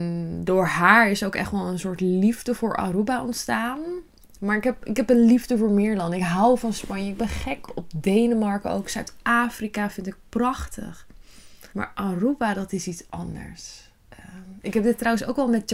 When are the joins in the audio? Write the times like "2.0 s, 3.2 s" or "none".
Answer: 7.7 s, 11.7 s